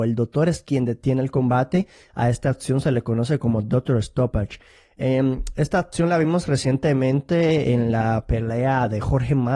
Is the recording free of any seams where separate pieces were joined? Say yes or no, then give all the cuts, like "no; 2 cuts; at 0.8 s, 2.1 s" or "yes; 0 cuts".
yes; 0 cuts